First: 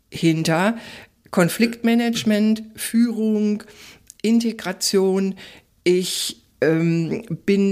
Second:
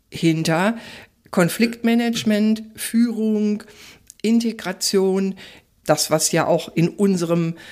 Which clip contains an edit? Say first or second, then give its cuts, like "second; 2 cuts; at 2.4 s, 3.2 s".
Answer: second; 1 cut; at 5.8 s